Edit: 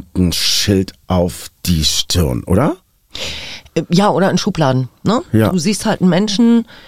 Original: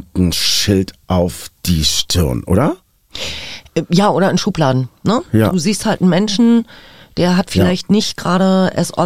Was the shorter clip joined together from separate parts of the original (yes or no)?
no